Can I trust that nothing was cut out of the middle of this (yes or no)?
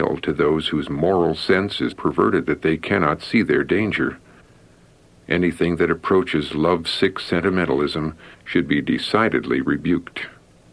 no